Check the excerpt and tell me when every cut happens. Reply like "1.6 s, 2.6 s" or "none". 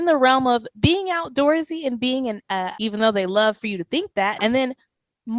2.8 s, 4.4 s